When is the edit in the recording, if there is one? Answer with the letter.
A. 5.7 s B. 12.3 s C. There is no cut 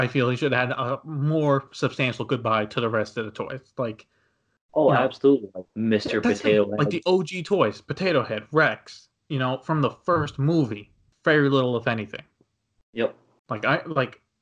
A